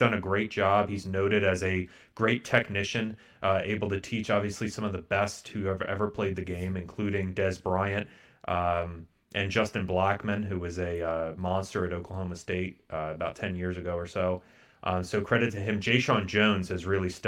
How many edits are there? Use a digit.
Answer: 0